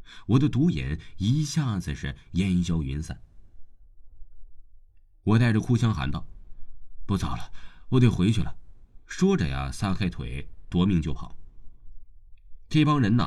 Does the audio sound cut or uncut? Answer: uncut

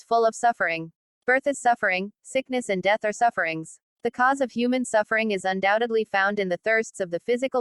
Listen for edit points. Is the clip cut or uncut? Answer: cut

